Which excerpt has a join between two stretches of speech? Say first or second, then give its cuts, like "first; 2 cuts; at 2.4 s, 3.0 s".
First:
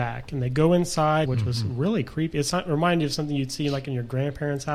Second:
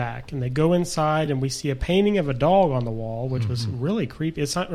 first; 1 cut; at 1.3 s